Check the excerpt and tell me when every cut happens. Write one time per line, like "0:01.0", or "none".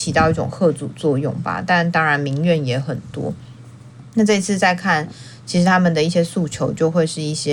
none